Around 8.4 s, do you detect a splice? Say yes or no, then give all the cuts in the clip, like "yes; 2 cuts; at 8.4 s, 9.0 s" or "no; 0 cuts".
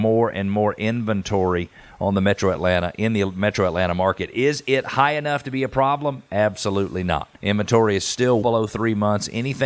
yes; 2 cuts; at 7.4 s, 8.4 s